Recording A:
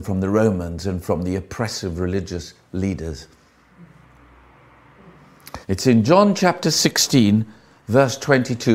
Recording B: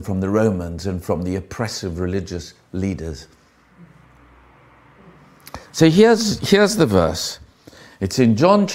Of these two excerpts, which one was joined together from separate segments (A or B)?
A